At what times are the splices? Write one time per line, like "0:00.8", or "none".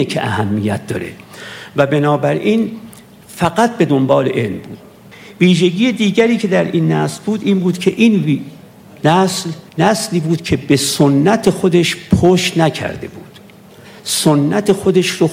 0:09.7